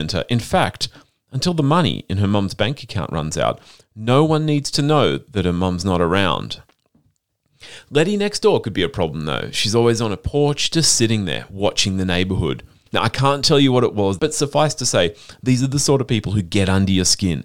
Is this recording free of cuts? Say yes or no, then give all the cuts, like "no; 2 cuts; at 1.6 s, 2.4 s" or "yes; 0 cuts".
no; 2 cuts; at 12.9 s, 14.2 s